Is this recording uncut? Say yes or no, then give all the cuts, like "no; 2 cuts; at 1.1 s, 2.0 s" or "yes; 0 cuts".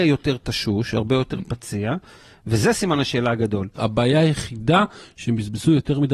no; 1 cut; at 3.8 s